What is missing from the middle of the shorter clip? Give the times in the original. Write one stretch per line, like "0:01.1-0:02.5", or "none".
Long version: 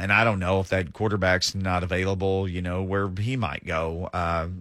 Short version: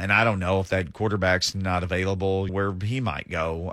0:02.5-0:02.8